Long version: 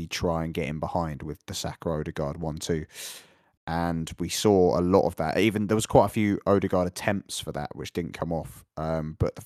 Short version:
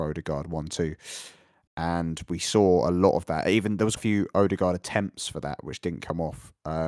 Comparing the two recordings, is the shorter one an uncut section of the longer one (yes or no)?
no